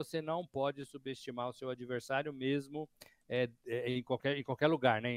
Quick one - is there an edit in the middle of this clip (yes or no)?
no